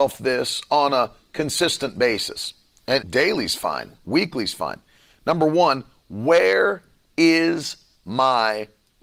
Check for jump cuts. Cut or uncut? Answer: cut